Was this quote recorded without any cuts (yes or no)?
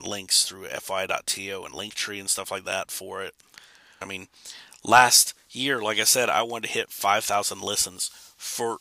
no